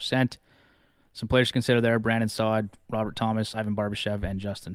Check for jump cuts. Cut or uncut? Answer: uncut